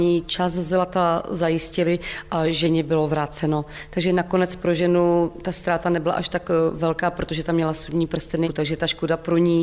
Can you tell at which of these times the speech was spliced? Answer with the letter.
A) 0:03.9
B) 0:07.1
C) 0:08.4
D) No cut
C